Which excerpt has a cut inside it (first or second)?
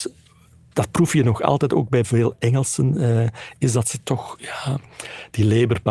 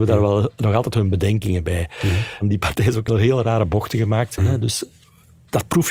second